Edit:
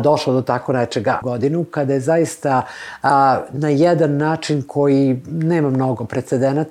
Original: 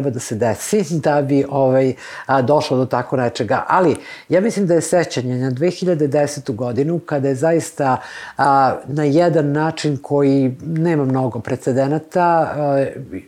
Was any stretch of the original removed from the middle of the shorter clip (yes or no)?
yes